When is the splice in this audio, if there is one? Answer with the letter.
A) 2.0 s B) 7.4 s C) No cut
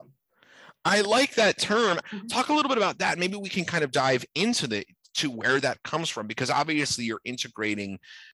A